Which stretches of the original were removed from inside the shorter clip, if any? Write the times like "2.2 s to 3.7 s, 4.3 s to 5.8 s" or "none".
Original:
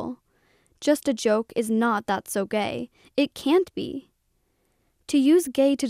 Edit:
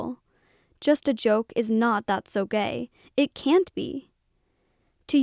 none